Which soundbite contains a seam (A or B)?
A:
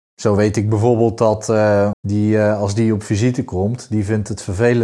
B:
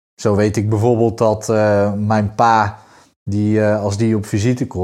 A